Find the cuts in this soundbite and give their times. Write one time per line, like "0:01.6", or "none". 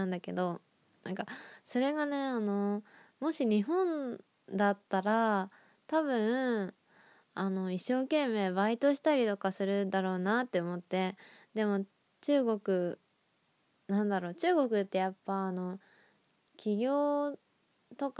none